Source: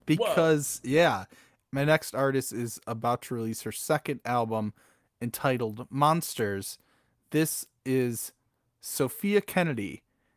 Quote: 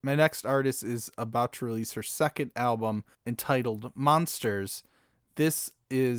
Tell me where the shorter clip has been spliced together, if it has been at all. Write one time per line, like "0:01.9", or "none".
0:03.1